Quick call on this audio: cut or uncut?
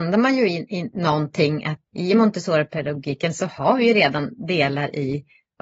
cut